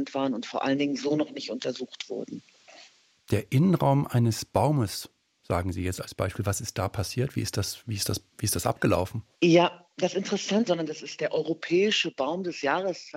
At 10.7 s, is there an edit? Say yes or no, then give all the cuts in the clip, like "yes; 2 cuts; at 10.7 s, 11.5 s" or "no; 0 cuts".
yes; 2 cuts; at 9.3 s, 10.7 s